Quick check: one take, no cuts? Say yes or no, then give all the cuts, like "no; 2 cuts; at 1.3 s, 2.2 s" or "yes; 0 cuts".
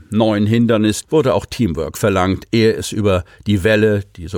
no; 1 cut; at 1.0 s